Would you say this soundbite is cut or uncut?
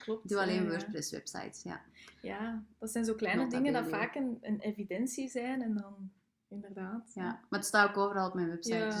uncut